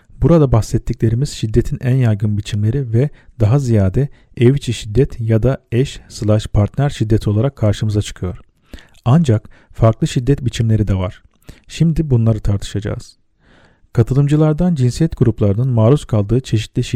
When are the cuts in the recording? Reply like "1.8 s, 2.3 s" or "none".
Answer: none